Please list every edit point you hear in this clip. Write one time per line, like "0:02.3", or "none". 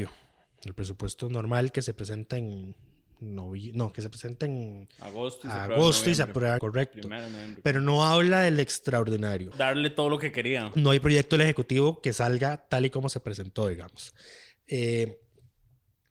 0:06.6
0:09.5